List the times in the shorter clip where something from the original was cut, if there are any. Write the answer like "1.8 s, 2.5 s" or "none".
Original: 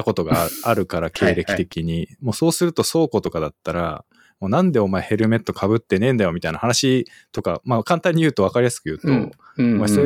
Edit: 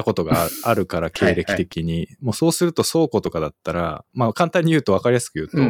4.1 s